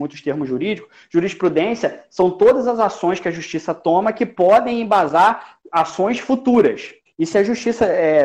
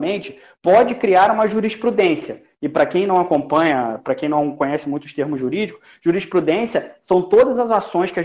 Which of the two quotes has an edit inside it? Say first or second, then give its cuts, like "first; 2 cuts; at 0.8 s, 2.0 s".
first; 1 cut; at 7.1 s